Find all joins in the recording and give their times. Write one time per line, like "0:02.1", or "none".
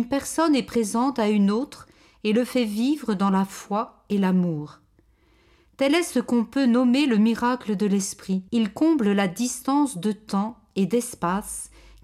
0:08.5